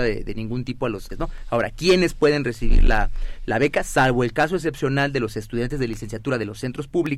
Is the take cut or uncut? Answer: cut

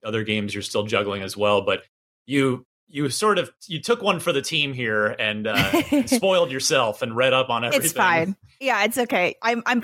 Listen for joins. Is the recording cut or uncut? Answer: uncut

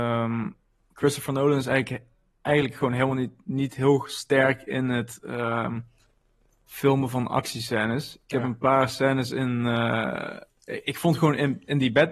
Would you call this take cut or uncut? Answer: uncut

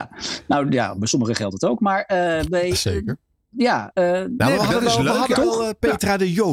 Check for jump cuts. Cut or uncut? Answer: uncut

